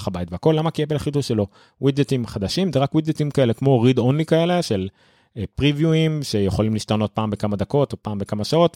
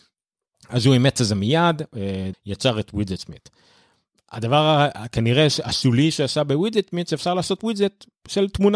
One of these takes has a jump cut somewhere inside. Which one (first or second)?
second